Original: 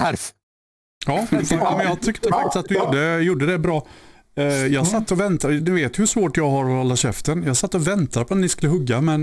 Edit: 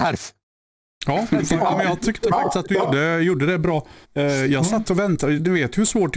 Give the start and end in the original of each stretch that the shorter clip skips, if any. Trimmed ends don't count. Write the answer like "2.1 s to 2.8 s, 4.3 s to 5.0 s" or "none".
4.0 s to 4.2 s